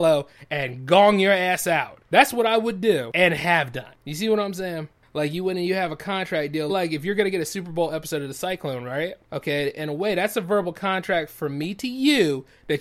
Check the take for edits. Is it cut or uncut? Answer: cut